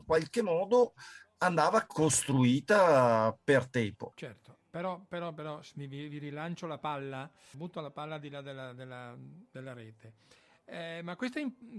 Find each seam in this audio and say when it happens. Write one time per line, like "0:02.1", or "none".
0:04.1
0:07.5